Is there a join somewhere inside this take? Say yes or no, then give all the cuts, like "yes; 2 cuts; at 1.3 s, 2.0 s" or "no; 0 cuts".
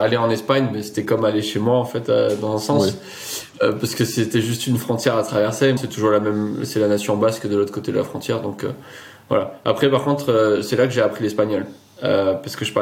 yes; 1 cut; at 5.8 s